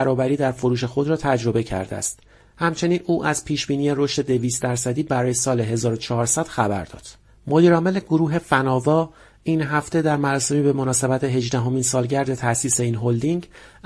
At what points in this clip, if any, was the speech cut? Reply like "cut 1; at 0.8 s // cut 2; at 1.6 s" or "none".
none